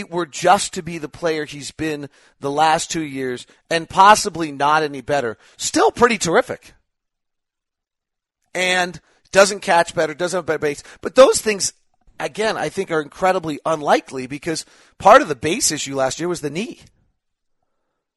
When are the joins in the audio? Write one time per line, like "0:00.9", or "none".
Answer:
0:08.4